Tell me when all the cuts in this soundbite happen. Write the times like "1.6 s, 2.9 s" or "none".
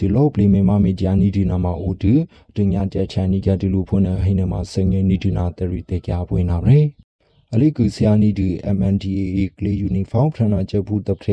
none